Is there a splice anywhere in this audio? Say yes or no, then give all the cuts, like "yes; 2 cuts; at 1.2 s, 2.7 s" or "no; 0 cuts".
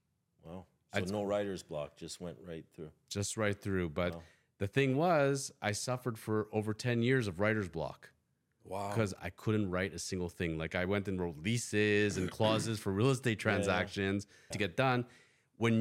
yes; 2 cuts; at 9.2 s, 14.5 s